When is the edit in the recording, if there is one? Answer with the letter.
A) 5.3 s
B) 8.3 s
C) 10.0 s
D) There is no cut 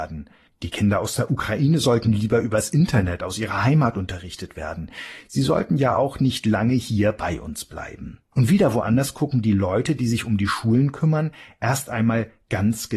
B